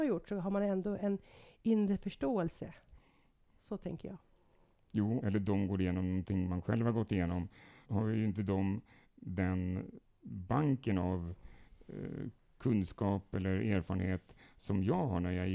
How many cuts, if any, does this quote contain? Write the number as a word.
two